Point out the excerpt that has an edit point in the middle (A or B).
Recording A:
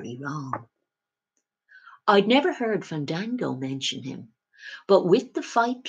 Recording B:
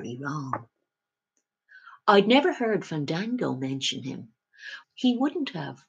B